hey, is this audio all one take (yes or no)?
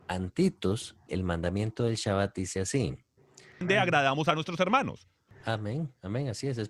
no